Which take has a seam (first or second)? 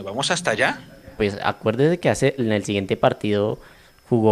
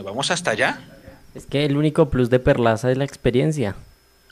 first